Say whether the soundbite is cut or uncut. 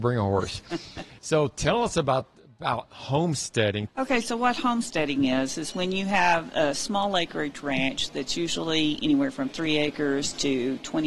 cut